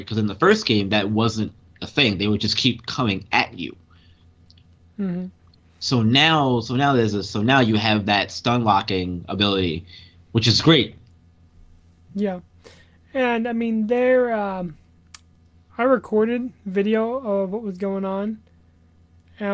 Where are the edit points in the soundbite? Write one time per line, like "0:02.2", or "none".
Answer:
none